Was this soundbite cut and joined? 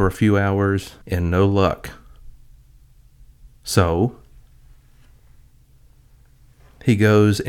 yes; 1 cut; at 1.0 s

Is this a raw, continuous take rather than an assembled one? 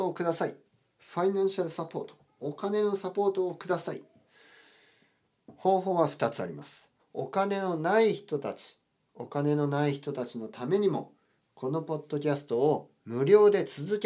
no; 1 cut; at 7.0 s

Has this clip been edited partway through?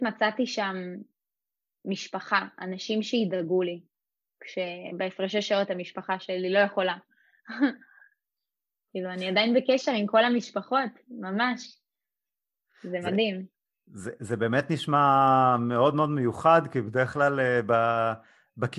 no; 0 cuts

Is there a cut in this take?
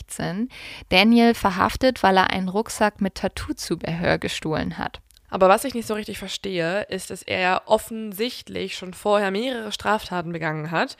yes; 1 cut; at 5.2 s

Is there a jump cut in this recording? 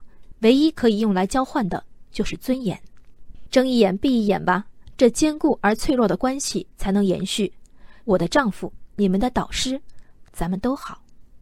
yes; 2 cuts; at 8.0 s, 10.2 s

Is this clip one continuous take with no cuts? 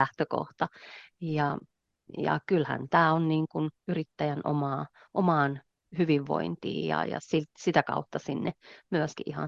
yes; 0 cuts

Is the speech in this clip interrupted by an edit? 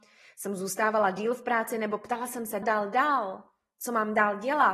yes; 1 cut; at 2.6 s

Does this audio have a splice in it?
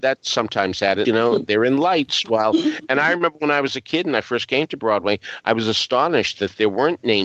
yes; 1 cut; at 1.0 s

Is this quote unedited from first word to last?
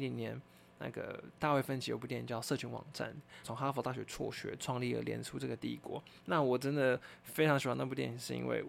no; 1 cut; at 3.4 s

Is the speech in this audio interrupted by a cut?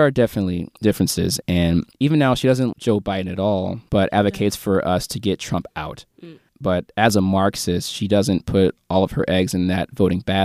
yes; 2 cuts; at 1.4 s, 2.7 s

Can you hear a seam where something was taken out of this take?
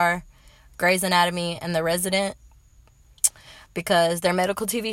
no; 0 cuts

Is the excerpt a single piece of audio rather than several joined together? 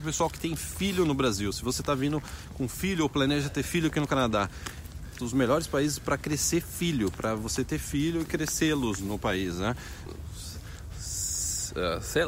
no; 2 cuts; at 5.2 s, 10.1 s

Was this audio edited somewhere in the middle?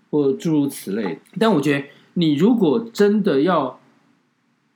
yes; 1 cut; at 1.2 s

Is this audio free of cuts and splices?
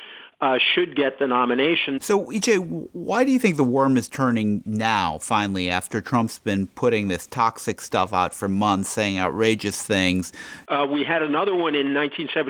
no; 2 cuts; at 2.0 s, 10.7 s

